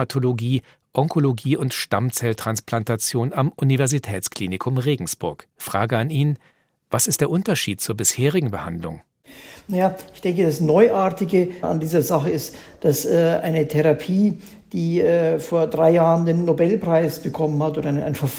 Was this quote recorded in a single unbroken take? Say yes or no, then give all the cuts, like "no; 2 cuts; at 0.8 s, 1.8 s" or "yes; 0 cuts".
no; 1 cut; at 5.5 s